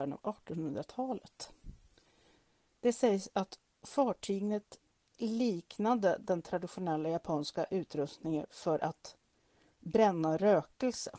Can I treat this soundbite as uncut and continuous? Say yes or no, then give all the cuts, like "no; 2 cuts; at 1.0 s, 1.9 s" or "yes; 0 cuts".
yes; 0 cuts